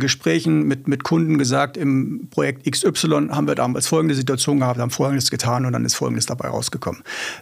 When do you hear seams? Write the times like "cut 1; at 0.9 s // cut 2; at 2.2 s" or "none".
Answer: none